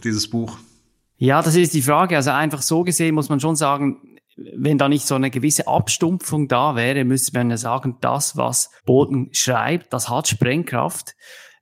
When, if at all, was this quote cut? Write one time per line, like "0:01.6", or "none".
0:08.8